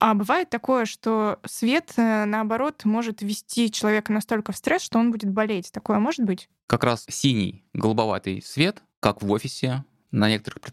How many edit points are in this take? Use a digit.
1